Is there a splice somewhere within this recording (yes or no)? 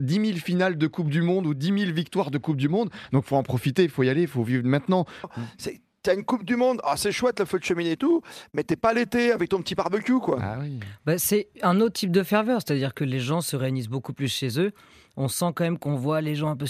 yes